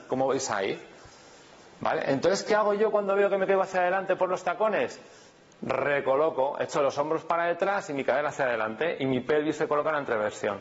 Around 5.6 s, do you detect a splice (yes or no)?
no